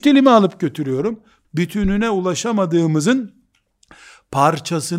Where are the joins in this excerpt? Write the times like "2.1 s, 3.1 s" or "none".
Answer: 1.4 s